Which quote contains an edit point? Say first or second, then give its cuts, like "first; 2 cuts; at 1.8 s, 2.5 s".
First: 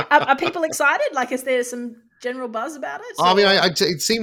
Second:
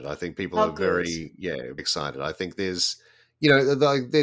second; 1 cut; at 1.8 s